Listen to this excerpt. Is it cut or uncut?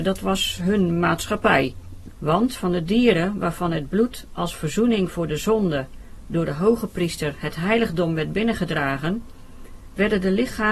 cut